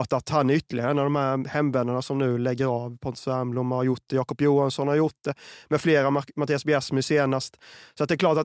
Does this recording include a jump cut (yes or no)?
no